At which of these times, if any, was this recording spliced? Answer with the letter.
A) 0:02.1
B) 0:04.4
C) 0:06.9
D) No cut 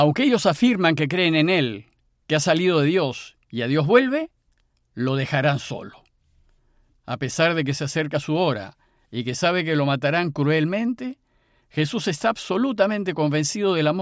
C